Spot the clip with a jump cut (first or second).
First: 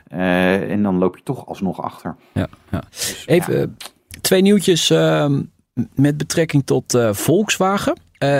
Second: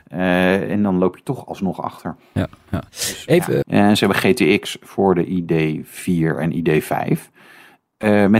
second